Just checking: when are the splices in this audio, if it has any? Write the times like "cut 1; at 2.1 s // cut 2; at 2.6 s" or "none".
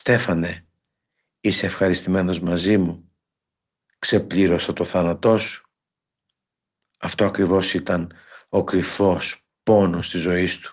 none

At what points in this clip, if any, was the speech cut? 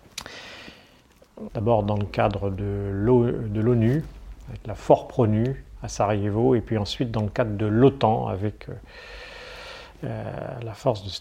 cut 1; at 1.5 s

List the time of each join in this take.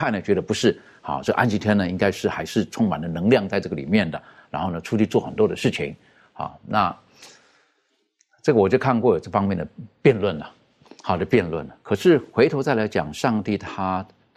none

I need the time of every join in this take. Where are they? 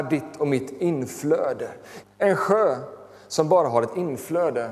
cut 1; at 2.0 s

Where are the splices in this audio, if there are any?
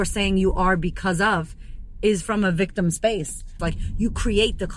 cut 1; at 3.6 s

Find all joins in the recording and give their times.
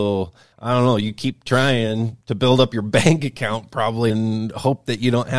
cut 1; at 4.1 s

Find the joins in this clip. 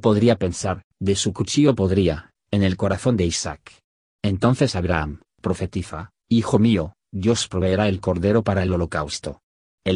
cut 1; at 0.9 s // cut 2; at 4.0 s // cut 3; at 5.3 s

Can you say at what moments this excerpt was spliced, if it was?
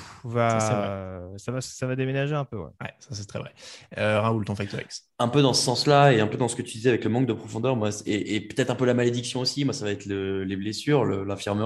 none

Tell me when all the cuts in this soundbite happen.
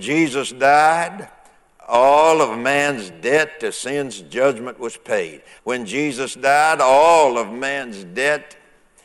cut 1; at 5.6 s

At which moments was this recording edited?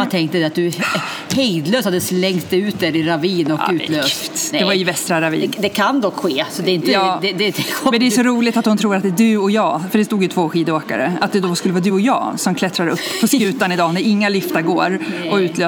none

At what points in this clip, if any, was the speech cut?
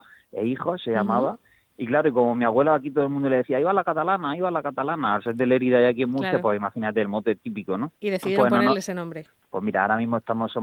cut 1; at 8.0 s // cut 2; at 9.4 s

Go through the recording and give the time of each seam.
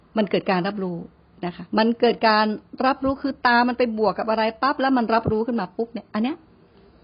cut 1; at 1.7 s

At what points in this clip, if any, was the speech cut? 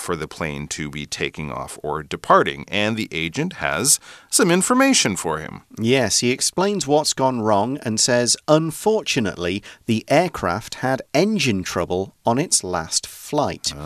none

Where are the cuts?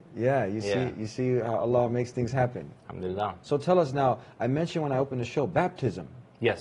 cut 1; at 3.4 s

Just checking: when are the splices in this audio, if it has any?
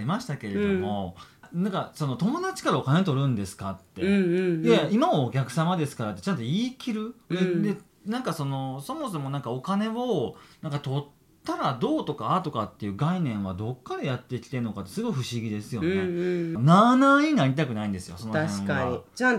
cut 1; at 16.6 s

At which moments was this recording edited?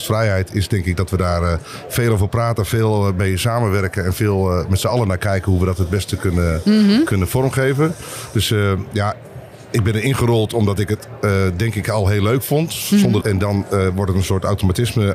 cut 1; at 13.2 s

